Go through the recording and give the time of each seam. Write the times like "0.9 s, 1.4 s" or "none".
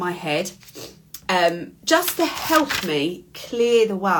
none